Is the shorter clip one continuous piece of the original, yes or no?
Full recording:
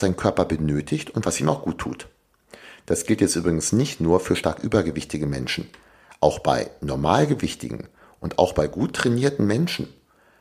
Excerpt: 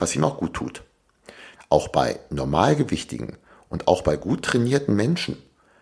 no